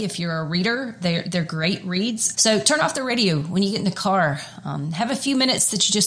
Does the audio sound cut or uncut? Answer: cut